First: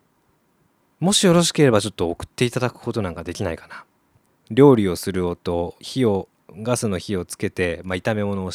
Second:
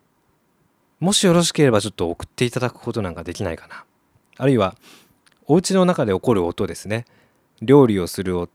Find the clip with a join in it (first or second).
first